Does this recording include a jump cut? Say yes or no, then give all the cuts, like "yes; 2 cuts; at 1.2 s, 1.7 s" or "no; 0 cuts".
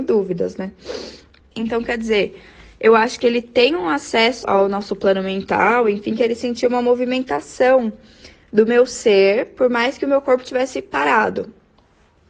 yes; 2 cuts; at 1.5 s, 4.4 s